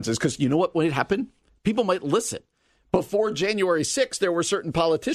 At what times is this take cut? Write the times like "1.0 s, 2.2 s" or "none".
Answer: none